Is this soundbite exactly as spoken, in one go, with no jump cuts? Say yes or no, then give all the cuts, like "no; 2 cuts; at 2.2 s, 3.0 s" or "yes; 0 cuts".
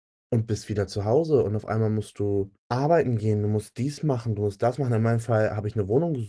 no; 1 cut; at 2.6 s